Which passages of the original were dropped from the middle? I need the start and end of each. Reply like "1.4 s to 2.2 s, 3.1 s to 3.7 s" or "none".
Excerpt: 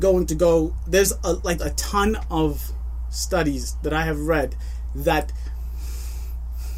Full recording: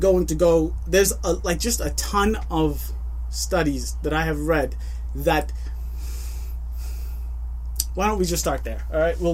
1.6 s to 1.8 s

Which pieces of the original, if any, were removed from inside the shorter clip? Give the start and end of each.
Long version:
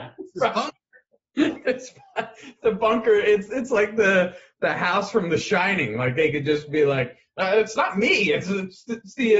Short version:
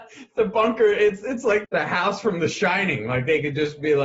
3.9 s to 4.5 s

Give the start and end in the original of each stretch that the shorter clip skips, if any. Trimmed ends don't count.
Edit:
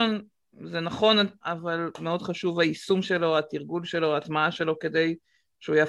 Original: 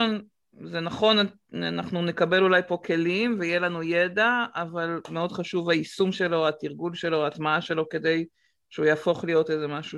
1.4 s to 4.5 s

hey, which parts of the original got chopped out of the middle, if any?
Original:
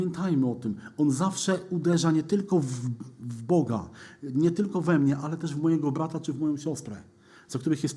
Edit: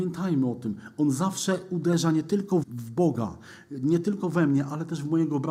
2.6 s to 3.1 s

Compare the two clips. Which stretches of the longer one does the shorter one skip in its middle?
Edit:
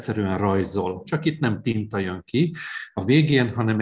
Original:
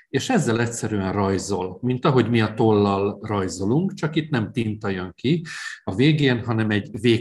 1.8 s to 4.0 s

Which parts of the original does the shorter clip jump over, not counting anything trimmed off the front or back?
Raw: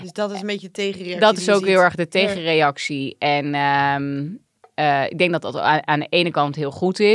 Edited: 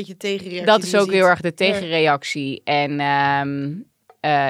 none

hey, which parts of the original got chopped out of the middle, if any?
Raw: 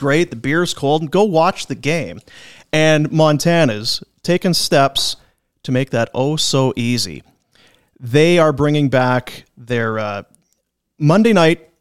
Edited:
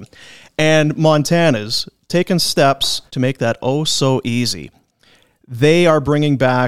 5.2 s to 5.6 s

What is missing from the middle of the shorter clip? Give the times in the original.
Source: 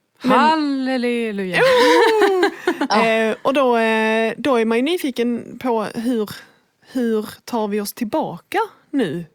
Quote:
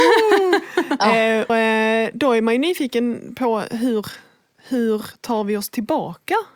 3.4 s to 3.7 s

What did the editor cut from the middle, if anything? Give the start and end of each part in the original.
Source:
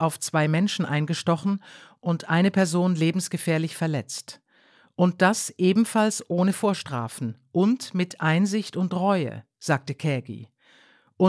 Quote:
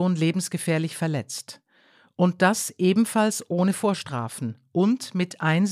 none

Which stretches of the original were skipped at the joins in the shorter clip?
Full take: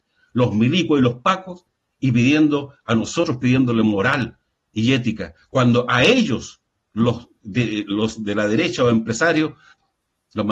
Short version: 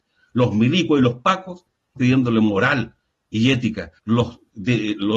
2.0 s to 3.4 s, 5.4 s to 6.9 s

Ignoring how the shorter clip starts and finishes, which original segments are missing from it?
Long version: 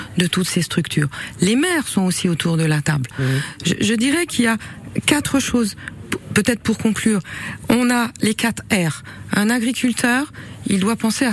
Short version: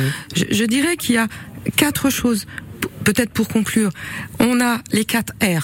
none

